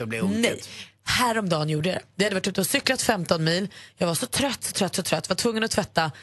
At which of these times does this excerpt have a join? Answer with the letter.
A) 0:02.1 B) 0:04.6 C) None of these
C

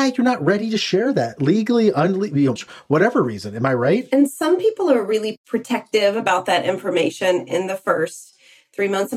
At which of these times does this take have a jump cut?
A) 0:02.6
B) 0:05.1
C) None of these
A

